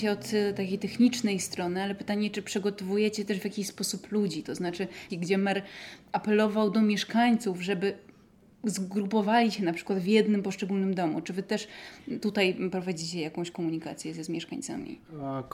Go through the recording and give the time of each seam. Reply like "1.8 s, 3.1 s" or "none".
5.1 s